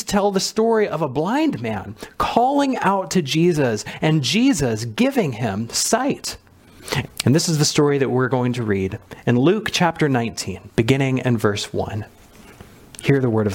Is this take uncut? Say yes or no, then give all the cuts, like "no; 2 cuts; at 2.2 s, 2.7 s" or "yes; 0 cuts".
no; 2 cuts; at 7.0 s, 10.7 s